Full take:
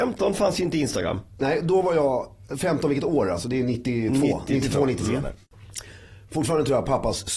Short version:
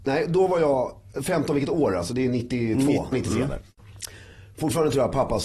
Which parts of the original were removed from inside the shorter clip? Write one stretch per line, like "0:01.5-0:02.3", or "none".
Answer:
0:04.5-0:04.9